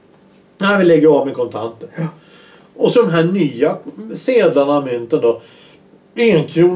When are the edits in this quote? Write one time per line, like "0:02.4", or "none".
none

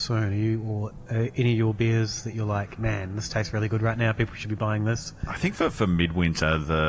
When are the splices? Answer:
none

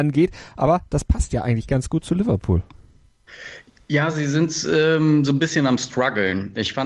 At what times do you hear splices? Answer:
none

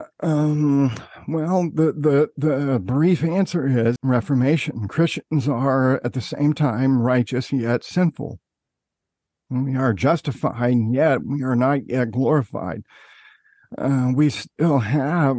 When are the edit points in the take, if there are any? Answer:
0:04.0

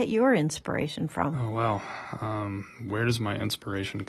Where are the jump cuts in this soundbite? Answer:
0:01.3

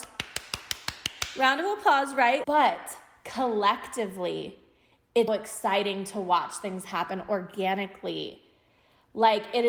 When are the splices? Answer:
0:02.4
0:05.3

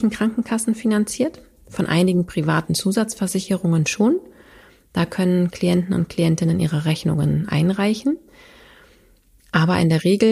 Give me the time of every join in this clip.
none

